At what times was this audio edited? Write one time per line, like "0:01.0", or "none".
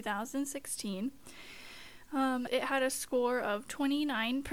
0:02.5